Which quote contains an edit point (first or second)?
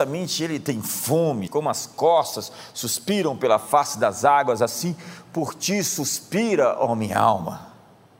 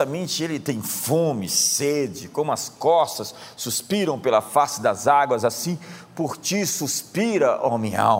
first